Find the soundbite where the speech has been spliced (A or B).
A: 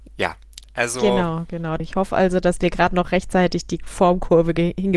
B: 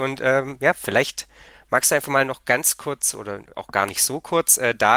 A